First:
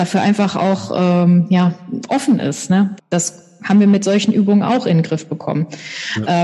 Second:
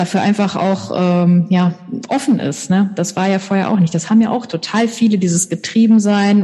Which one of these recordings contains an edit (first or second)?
first